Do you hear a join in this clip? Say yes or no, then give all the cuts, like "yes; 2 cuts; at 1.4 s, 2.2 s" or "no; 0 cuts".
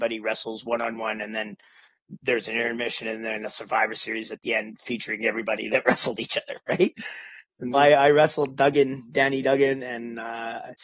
yes; 1 cut; at 7.7 s